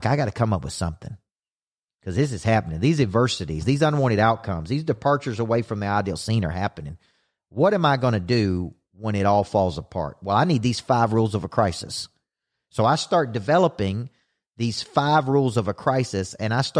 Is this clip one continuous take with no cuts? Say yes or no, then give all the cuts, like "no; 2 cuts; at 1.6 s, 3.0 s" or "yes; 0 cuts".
yes; 0 cuts